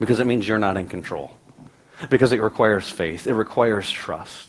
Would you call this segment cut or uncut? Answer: uncut